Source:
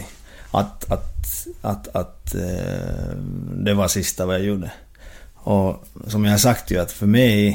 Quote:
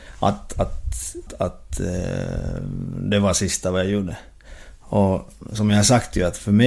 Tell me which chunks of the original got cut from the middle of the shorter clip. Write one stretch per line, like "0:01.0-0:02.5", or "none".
0:01.6-0:01.8